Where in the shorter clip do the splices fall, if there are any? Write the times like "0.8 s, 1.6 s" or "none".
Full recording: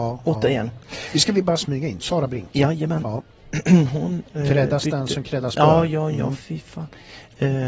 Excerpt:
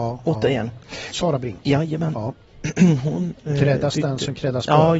1.1 s

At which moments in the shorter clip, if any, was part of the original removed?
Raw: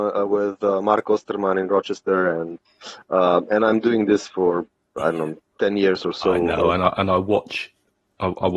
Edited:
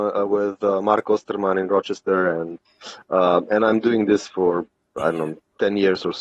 none

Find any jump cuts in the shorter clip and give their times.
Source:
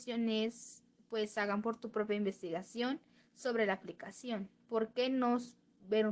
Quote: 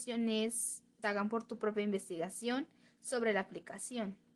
1.0 s

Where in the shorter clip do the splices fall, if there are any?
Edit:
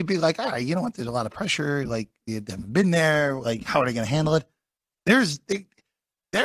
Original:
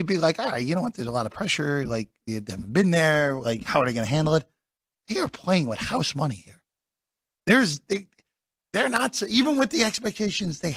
5.0 s

